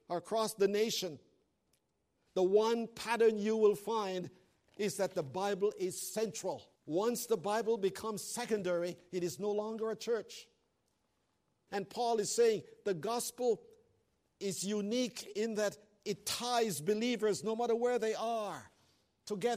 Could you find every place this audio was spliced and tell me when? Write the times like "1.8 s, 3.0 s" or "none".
6.7 s, 11.7 s